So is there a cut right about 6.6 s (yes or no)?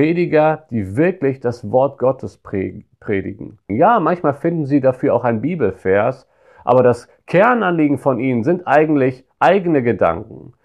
no